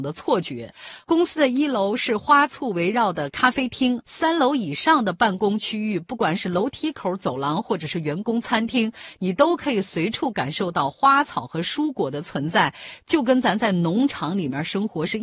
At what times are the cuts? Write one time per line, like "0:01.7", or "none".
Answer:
0:04.0